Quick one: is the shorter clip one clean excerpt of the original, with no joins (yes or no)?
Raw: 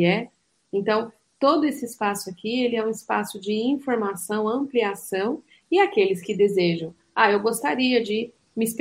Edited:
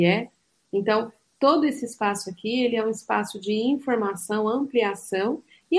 yes